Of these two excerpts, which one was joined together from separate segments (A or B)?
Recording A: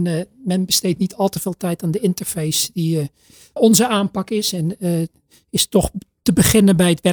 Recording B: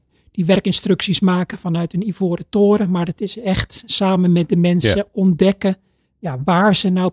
A